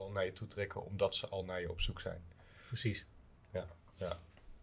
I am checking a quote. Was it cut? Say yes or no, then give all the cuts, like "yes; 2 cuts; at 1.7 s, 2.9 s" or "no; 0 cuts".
no; 0 cuts